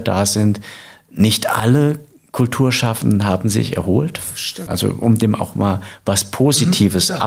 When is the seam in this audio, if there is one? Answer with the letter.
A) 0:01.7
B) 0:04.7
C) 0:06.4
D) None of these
B